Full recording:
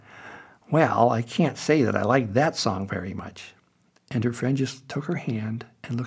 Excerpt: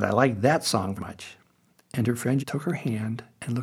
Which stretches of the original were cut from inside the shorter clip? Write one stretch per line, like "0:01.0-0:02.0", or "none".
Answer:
0:02.9-0:03.1
0:04.6-0:04.8